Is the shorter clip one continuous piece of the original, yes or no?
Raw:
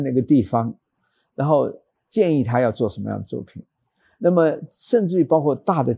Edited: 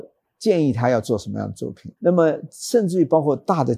no